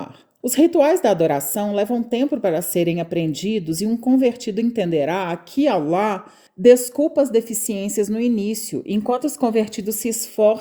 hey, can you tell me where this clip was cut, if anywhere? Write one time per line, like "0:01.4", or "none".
none